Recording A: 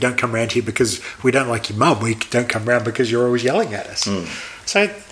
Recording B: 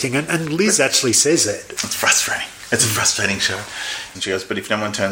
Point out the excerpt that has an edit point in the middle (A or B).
B